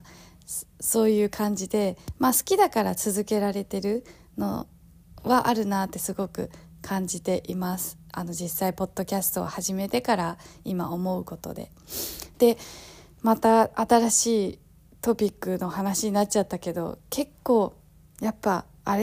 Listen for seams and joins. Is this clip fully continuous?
no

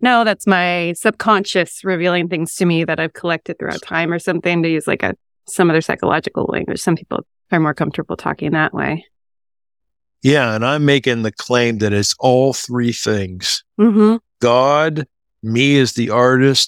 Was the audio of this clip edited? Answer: yes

